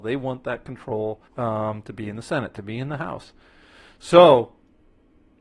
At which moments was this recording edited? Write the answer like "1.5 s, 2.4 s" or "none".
1.3 s